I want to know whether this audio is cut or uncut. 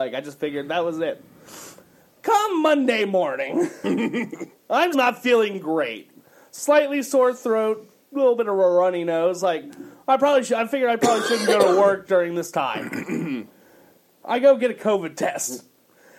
cut